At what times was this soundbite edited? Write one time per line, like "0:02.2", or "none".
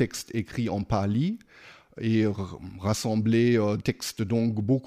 0:03.8

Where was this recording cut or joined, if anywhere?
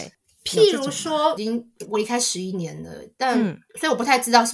0:01.4

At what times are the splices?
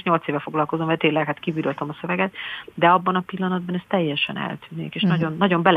none

